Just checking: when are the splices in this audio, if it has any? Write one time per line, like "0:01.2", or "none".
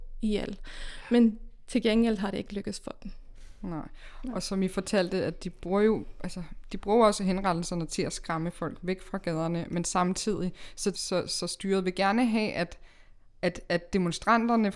0:10.9